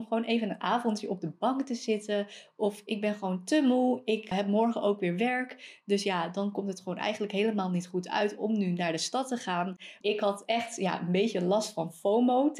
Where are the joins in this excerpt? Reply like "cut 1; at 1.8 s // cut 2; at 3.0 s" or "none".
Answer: cut 1; at 4.3 s // cut 2; at 10.0 s